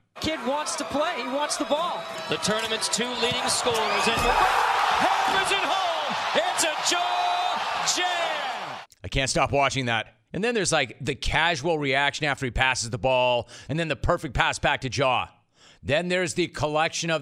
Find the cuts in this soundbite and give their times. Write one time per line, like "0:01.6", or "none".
0:10.2
0:13.7